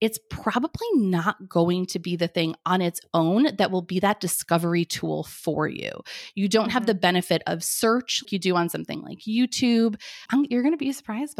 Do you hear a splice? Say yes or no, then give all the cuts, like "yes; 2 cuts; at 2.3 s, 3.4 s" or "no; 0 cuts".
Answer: yes; 2 cuts; at 8.2 s, 10.3 s